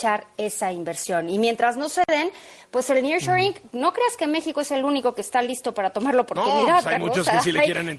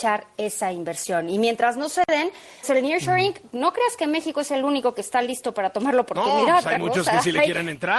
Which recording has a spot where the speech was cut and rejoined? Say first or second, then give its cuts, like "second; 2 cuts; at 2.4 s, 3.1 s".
second; 1 cut; at 2.6 s